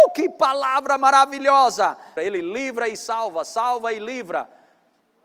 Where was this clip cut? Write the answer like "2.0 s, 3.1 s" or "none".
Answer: 2.2 s